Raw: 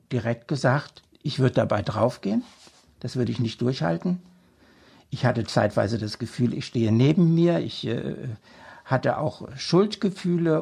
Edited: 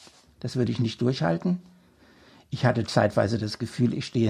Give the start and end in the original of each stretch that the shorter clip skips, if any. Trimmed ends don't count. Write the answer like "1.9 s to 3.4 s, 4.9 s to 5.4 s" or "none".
none